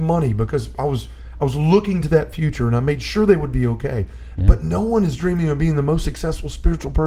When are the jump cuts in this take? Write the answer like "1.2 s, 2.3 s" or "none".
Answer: 4.4 s